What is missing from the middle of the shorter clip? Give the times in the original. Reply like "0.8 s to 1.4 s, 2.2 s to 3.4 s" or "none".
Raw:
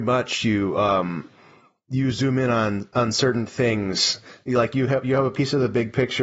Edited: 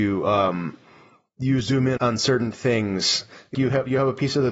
2.5 s to 2.9 s, 4.5 s to 4.7 s

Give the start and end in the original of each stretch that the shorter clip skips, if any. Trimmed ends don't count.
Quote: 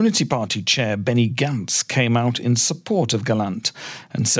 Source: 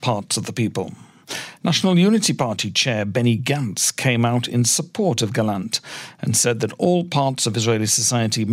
none

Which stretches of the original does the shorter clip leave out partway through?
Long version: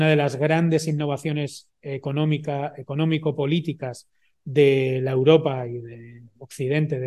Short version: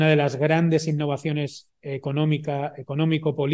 none

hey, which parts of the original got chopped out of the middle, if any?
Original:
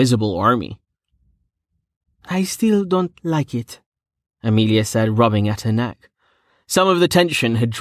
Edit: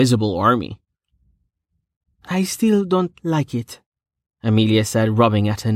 none

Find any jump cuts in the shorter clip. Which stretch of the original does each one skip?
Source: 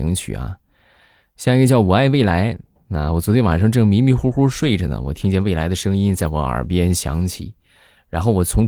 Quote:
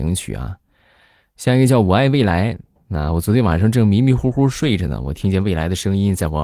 none

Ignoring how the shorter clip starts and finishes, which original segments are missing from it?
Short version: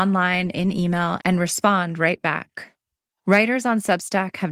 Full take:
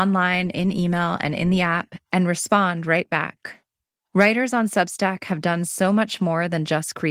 1.2 s to 2.0 s

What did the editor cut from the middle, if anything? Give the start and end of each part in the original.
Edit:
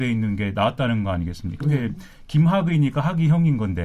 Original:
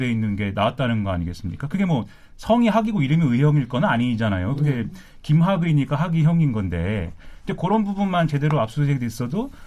1.6 s to 4.5 s

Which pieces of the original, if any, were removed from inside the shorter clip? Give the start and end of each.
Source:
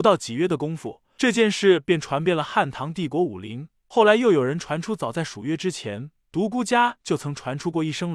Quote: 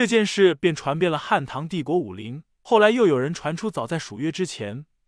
none

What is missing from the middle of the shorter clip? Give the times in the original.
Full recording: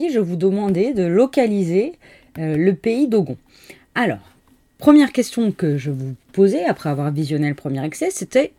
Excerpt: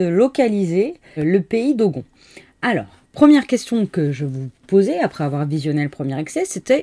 2.1 s to 2.5 s, 4.4 s to 4.7 s

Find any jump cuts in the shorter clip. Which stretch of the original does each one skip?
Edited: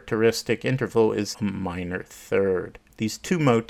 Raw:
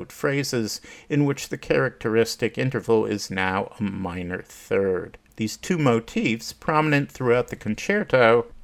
3.3 s to 3.7 s

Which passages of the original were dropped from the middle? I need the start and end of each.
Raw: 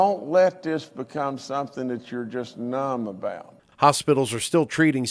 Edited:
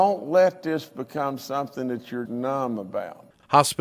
2.3 s to 2.5 s

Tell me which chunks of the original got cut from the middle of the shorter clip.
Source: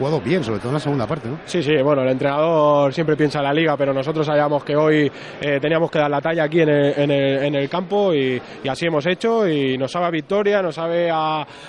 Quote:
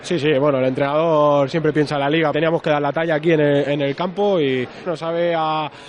3.8 s to 5.6 s, 6.9 s to 7.4 s, 8.6 s to 10.6 s

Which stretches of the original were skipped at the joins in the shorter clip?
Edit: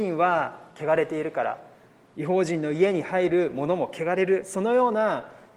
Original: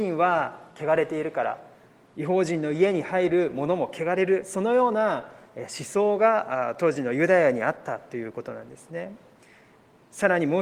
none

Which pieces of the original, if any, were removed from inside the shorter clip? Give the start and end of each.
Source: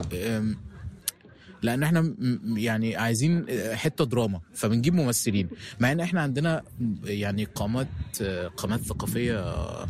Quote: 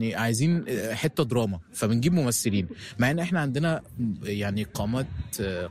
none

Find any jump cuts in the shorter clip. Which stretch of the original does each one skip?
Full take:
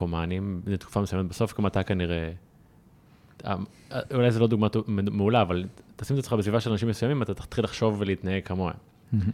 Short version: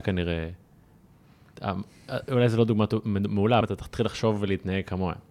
5.4 s to 7.2 s

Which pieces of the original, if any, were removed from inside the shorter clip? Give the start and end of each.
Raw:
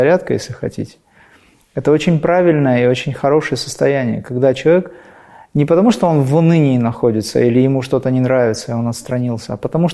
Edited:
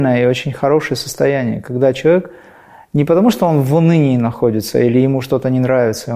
none

